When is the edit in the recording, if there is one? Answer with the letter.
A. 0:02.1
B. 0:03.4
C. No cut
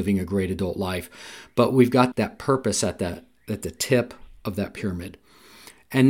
A